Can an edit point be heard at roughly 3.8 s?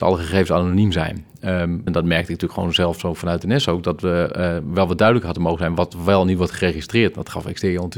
no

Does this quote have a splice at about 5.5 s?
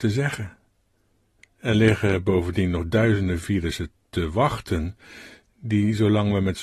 no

